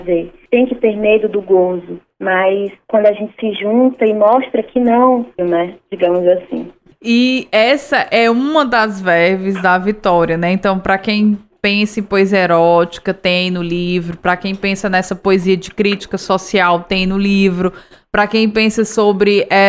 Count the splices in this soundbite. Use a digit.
1